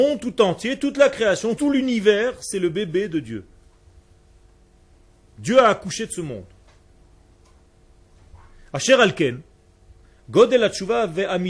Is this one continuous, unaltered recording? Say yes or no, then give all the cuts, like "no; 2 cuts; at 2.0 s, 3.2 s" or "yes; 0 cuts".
no; 1 cut; at 1.6 s